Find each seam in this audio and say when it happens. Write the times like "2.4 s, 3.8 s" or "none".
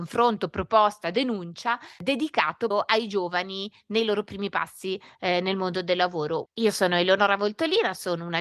2.7 s, 6.5 s